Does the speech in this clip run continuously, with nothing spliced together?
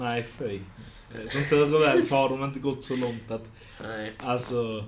yes; 0 cuts

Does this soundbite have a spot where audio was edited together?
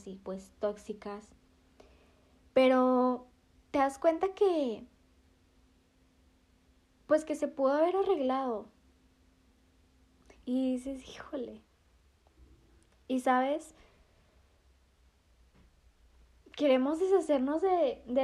no; 0 cuts

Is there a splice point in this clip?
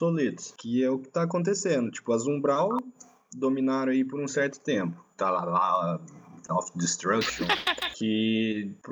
yes; 1 cut; at 5.1 s

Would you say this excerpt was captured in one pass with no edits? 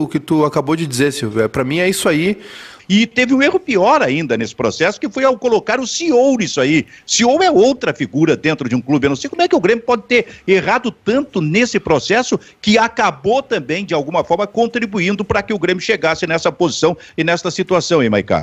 no; 1 cut; at 2.8 s

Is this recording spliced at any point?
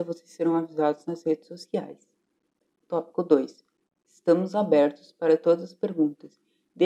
no; 0 cuts

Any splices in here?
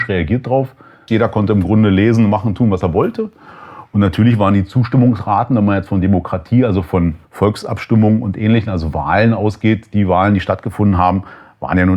yes; 3 cuts; at 1.1 s, 3.8 s, 7.2 s

